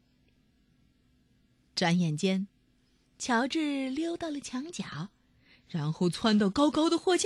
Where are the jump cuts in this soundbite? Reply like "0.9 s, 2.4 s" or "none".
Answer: none

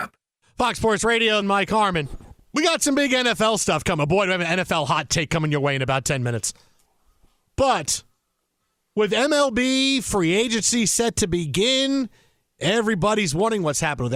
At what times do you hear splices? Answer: 1.4 s

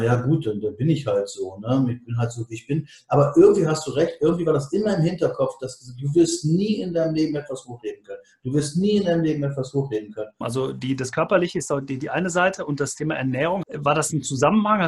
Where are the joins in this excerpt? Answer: 10.4 s, 13.6 s

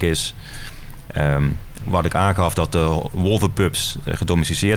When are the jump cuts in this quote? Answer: 1.8 s

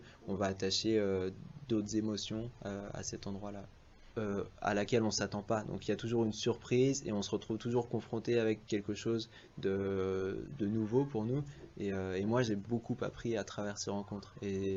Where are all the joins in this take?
4.1 s

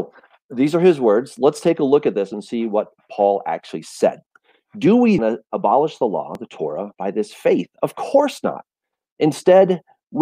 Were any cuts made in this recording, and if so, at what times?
5.2 s

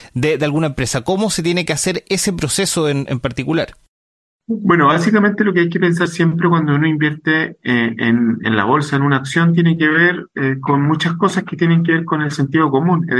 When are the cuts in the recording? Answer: none

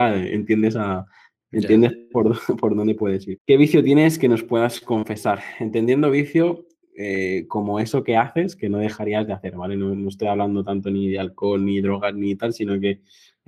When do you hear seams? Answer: 3.4 s

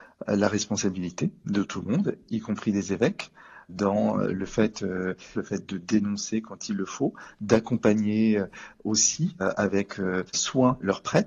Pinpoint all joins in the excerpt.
5.4 s

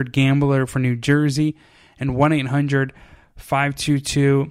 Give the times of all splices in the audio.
none

